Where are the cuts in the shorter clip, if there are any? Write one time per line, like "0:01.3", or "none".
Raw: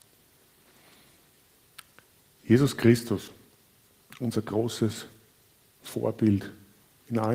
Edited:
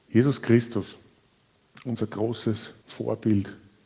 0:02.8